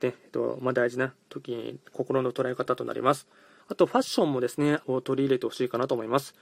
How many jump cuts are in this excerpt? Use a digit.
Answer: 2